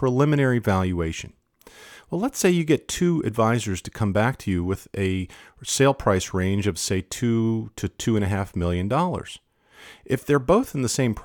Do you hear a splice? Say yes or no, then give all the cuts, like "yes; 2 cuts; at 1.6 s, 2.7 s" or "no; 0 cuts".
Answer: no; 0 cuts